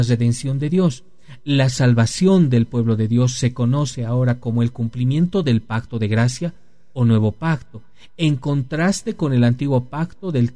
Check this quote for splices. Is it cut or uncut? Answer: uncut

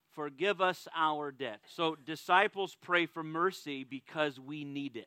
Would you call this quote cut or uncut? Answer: cut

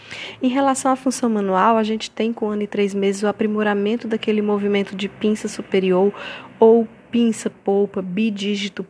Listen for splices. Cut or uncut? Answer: cut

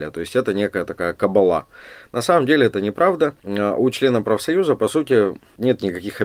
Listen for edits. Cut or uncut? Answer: uncut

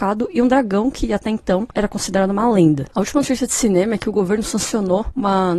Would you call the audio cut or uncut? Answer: cut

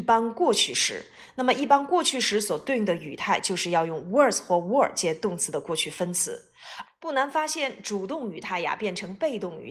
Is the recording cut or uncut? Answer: cut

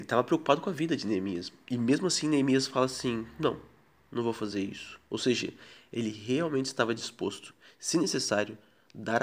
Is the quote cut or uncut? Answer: uncut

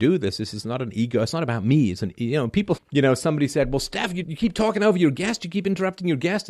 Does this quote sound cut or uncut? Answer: cut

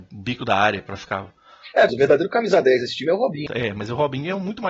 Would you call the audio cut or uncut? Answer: cut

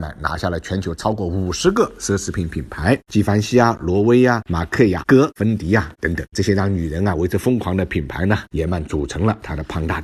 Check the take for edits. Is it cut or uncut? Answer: cut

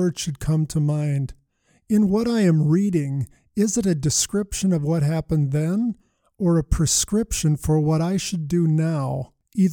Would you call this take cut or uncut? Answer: uncut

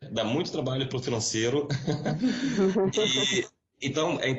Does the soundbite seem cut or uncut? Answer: uncut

